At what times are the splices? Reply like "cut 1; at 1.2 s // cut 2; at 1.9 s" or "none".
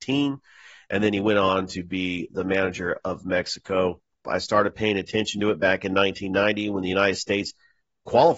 cut 1; at 4.2 s

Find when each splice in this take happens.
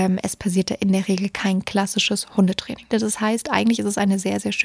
cut 1; at 2.9 s

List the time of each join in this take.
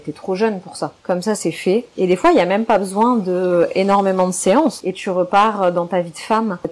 cut 1; at 1.0 s

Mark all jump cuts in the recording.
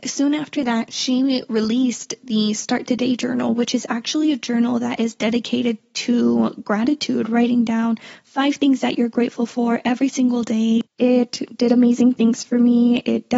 cut 1; at 10.8 s

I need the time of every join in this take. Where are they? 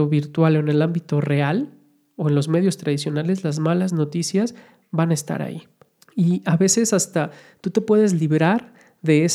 cut 1; at 6.0 s

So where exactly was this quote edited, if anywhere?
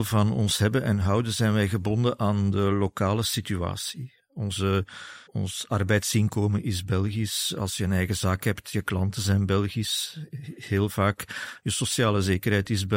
cut 1; at 5.3 s

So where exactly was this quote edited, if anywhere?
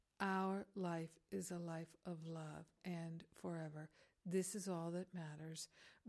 cut 1; at 2.8 s

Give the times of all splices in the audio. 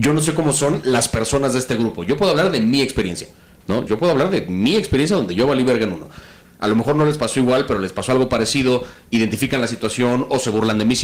cut 1; at 3.9 s // cut 2; at 6.4 s

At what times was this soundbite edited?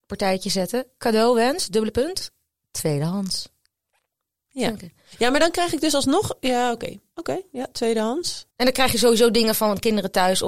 cut 1; at 8.5 s

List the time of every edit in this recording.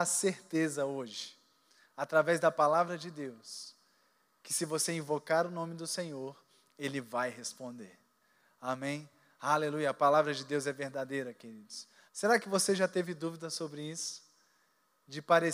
cut 1; at 12.1 s

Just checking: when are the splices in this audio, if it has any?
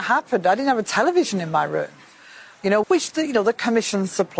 cut 1; at 2.8 s

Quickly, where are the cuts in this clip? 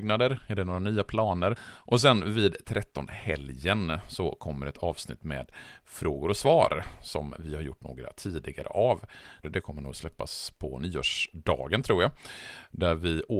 cut 1; at 1.6 s // cut 2; at 9.4 s

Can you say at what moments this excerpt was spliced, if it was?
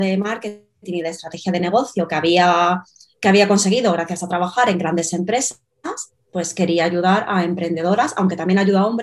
none

